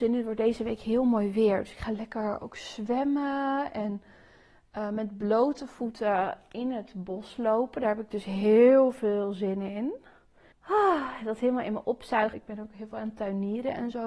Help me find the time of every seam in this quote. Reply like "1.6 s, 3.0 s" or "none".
10.5 s, 12.3 s